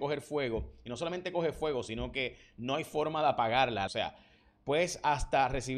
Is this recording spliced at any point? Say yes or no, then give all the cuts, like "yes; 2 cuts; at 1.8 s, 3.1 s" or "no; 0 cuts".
yes; 1 cut; at 3.9 s